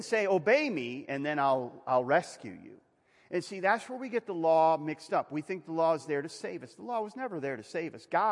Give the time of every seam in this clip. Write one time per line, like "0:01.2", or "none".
none